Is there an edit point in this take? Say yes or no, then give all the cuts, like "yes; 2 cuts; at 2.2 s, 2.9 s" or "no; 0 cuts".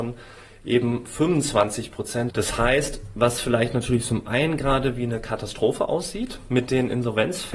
yes; 1 cut; at 2.3 s